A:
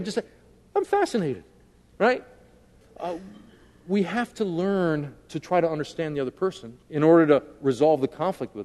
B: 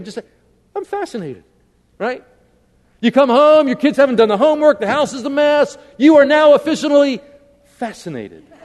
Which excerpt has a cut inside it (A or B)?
A